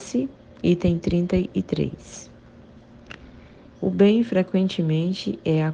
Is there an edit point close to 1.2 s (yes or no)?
no